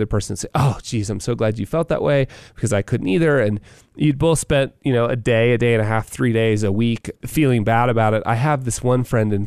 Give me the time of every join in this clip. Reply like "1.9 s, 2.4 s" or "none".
none